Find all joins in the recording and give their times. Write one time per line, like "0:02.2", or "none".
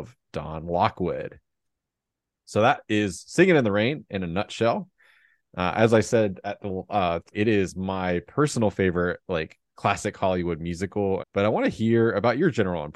0:07.3
0:11.2